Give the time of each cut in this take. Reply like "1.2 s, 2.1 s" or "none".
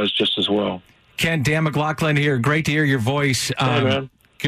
none